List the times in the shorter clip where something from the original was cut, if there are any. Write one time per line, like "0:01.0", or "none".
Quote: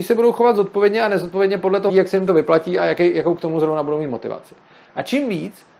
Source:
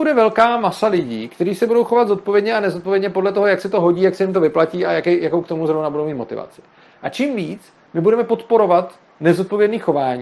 0:01.9